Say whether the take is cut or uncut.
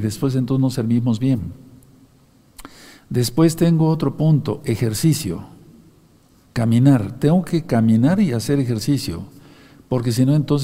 uncut